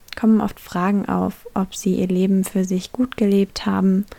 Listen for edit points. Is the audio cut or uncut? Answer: uncut